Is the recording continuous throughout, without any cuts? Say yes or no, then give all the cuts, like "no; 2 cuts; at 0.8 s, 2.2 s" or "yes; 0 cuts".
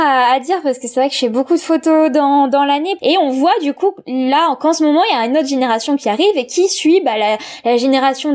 no; 1 cut; at 3.0 s